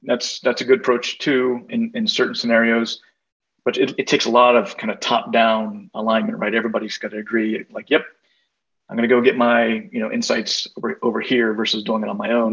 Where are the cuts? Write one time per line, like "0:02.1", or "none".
0:01.7